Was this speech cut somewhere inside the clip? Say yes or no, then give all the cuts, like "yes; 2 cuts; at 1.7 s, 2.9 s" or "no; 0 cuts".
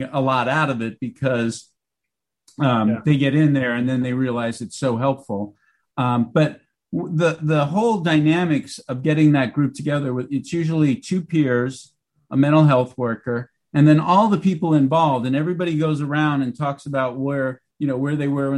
no; 0 cuts